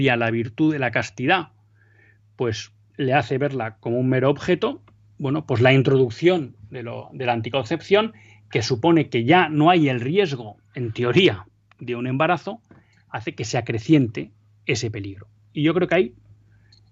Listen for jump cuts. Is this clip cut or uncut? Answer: uncut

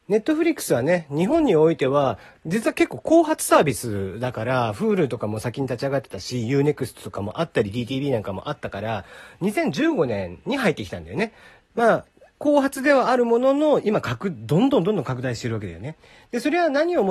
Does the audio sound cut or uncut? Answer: cut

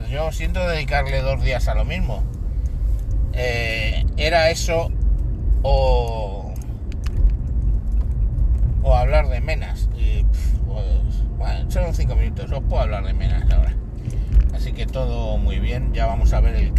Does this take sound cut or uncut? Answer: cut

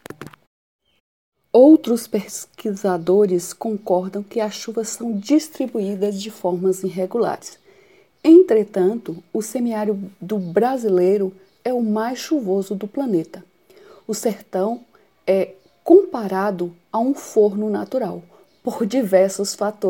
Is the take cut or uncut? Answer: uncut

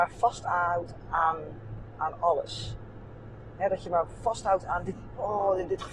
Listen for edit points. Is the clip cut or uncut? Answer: uncut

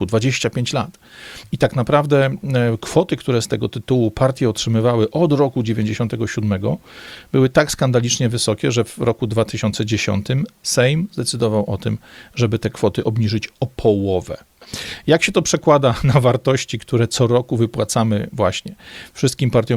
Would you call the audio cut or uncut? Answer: uncut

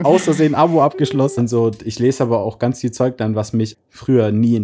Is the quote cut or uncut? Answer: cut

